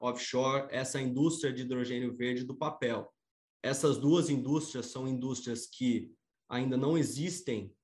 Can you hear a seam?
yes; 1 cut; at 3.6 s

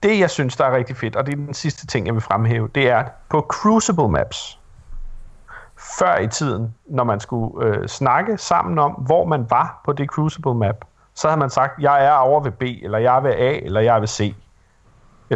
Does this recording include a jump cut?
no; 0 cuts

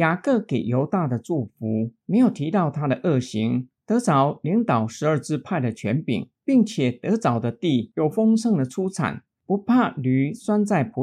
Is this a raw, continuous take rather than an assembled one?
no; 1 cut; at 3.8 s

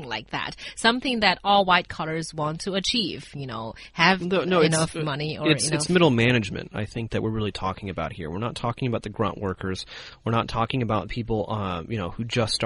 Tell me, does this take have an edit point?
no; 0 cuts

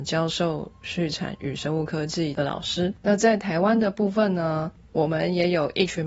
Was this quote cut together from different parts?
no; 0 cuts

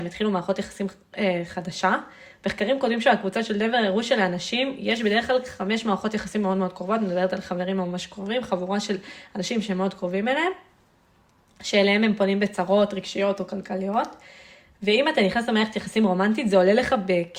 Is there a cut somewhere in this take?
no; 0 cuts

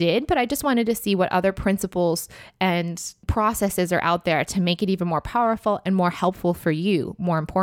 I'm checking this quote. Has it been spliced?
no; 0 cuts

